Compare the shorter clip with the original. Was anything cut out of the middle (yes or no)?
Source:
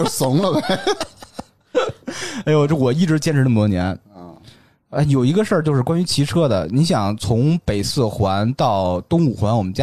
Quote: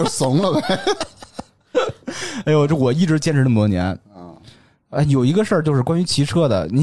no